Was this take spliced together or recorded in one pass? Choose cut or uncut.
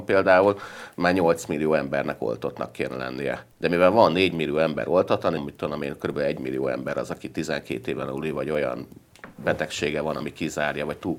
cut